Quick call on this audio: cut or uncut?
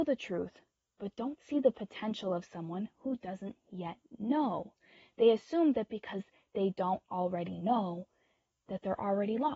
uncut